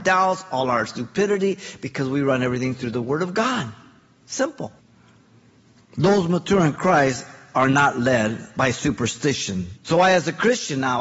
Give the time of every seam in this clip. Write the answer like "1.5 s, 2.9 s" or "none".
9.8 s